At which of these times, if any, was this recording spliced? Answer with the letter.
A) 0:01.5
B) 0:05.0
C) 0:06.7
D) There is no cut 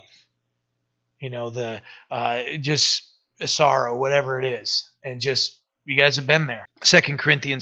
C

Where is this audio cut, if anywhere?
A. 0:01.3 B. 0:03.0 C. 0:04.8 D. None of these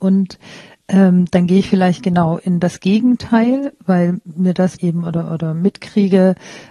C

